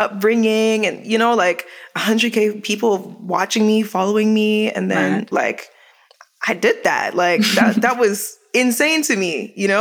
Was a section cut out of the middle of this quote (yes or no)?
yes